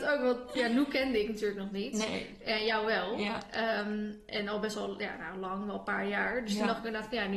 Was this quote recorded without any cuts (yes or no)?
yes